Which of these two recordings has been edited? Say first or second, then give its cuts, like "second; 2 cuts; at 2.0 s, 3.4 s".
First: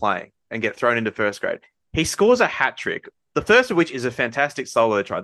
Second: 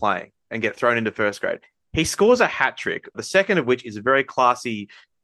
second; 1 cut; at 3.1 s